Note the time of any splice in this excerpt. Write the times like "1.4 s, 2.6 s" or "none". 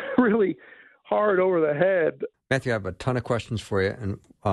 2.3 s